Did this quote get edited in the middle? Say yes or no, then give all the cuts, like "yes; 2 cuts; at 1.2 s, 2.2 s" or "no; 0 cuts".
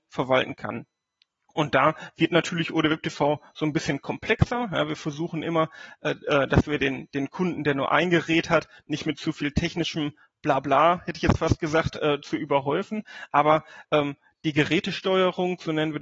no; 0 cuts